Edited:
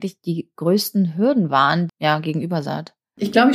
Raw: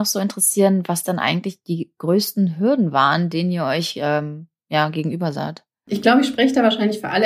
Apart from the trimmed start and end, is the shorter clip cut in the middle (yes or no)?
yes